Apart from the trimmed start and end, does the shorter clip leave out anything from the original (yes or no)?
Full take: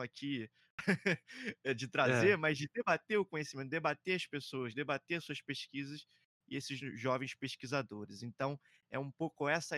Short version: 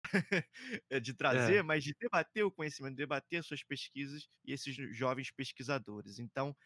yes